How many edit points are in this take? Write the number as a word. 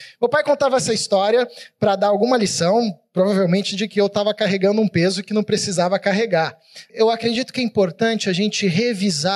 one